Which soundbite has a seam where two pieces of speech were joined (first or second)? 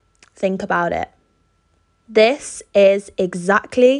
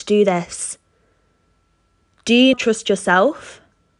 second